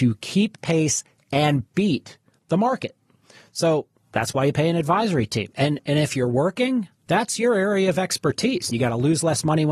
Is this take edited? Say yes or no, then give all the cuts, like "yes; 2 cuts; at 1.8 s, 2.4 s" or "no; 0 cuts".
yes; 2 cuts; at 5.5 s, 8.7 s